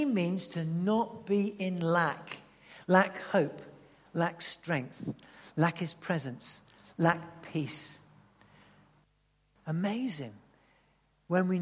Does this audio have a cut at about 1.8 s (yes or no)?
no